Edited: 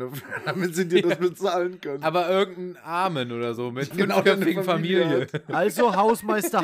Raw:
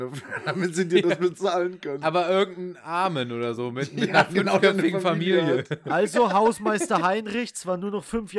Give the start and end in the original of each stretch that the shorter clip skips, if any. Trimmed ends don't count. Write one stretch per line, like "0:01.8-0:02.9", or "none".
0:03.9-0:04.3